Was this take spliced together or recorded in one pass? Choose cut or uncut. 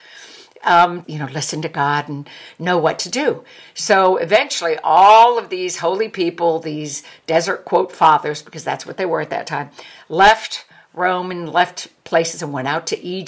cut